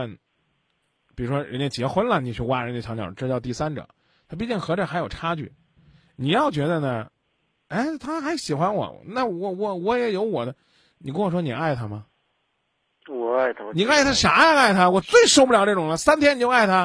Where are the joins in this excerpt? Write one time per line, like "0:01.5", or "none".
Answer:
none